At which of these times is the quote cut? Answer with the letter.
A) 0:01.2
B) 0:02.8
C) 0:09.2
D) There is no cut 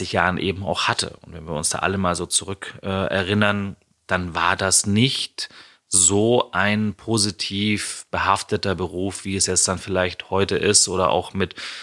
D